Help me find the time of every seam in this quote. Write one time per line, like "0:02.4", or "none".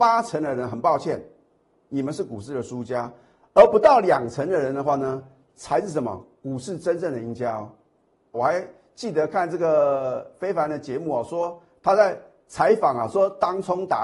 0:08.3